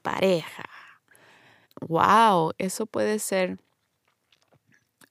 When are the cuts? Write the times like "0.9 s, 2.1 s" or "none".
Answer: 1.6 s